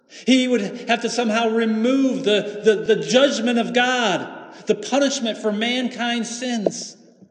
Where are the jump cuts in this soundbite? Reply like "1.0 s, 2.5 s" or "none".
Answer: none